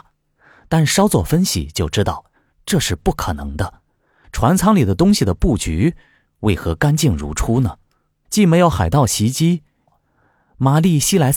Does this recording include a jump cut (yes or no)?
yes